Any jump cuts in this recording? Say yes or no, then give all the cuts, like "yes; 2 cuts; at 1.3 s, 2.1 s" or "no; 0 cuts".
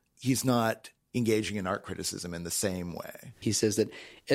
yes; 1 cut; at 3.4 s